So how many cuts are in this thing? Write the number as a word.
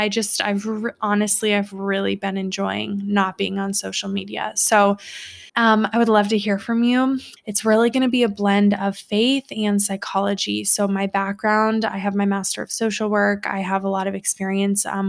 two